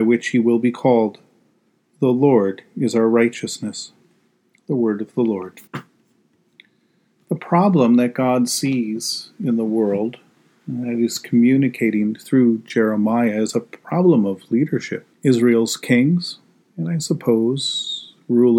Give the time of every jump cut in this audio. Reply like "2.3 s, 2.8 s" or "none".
5.7 s, 15.1 s